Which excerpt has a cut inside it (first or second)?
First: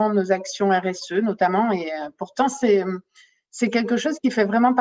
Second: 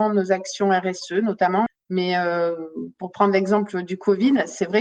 second